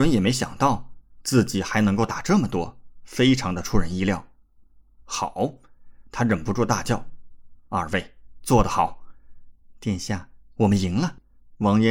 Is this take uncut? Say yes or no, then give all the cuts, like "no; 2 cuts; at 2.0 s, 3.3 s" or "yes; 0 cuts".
yes; 0 cuts